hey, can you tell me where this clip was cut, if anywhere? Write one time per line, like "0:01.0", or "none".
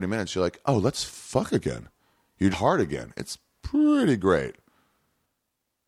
0:02.5

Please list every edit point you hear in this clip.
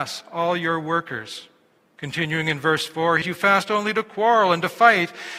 0:03.2

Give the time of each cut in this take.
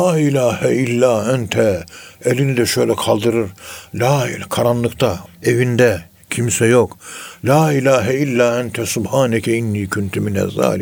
0:05.3

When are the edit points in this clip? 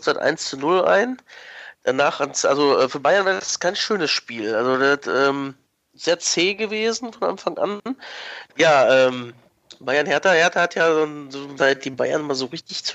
0:08.5
0:11.6

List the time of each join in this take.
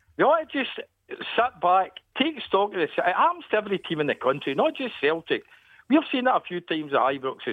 none

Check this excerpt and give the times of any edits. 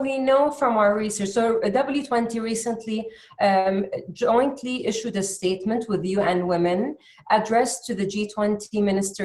none

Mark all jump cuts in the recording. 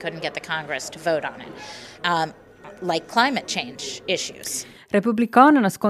0:02.0

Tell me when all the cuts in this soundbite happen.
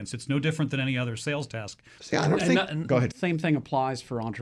0:02.0
0:03.1

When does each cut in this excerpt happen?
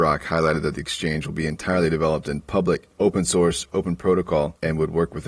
none

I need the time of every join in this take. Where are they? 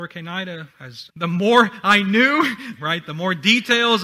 0:01.1
0:02.8

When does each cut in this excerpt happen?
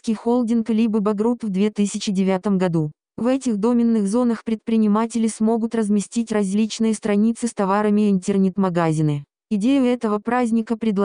0:03.1
0:09.4

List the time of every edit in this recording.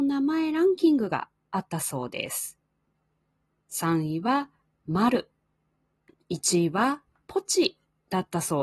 0:06.1

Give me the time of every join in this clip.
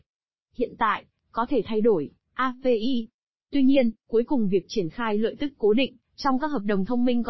0:01.2

